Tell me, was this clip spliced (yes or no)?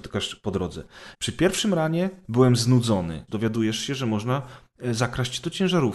yes